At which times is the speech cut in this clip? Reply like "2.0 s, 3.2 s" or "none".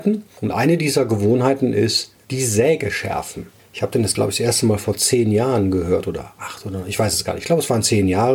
3.6 s